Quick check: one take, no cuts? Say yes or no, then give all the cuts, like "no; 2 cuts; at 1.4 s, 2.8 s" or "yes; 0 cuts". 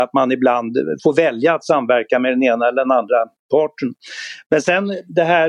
no; 1 cut; at 1.0 s